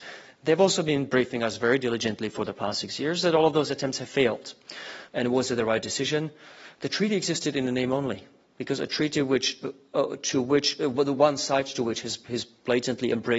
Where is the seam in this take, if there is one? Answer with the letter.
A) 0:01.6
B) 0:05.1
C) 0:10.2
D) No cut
B